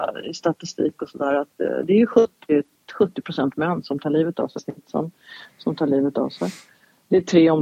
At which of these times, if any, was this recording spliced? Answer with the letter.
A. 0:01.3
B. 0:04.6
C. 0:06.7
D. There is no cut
B